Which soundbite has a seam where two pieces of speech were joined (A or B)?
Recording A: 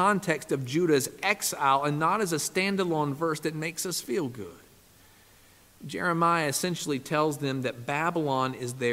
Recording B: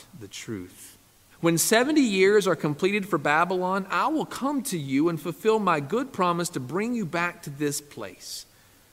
B